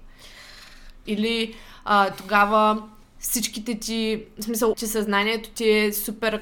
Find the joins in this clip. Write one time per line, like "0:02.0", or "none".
0:01.1
0:04.7